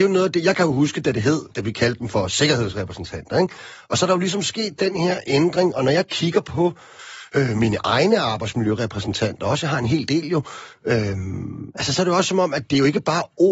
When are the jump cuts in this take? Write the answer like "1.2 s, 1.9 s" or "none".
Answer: none